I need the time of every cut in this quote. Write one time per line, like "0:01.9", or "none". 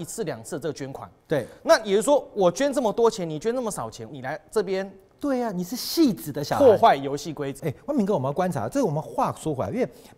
0:04.1
0:07.6